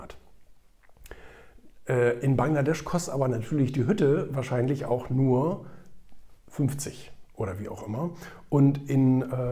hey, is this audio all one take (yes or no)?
yes